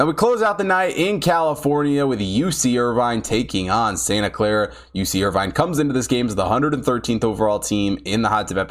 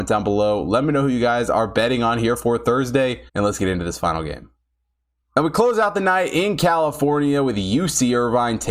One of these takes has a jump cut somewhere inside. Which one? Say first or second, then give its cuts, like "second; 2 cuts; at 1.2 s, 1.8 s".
second; 1 cut; at 3.3 s